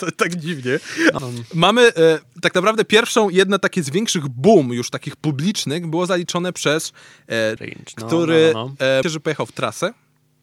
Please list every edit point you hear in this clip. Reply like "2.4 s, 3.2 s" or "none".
1.2 s, 7.6 s, 9.0 s